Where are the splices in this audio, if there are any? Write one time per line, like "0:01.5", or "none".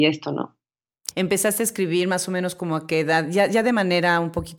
0:01.1